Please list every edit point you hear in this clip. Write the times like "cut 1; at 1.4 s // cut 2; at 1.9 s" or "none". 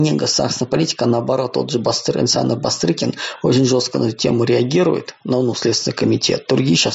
none